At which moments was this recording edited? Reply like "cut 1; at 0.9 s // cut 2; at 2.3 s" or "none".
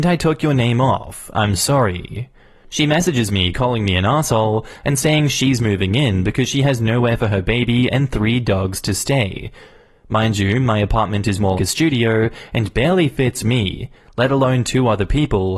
cut 1; at 11.6 s